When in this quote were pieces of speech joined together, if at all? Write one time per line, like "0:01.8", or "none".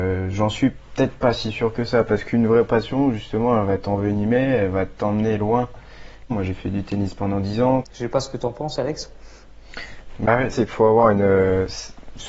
0:06.3
0:07.8
0:10.5